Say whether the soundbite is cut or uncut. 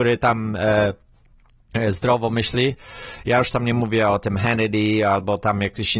uncut